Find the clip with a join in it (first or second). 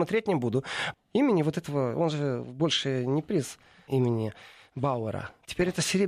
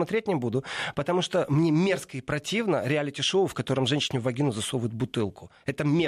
first